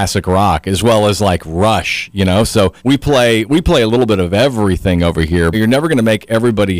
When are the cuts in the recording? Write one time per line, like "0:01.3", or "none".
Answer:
0:02.8
0:05.5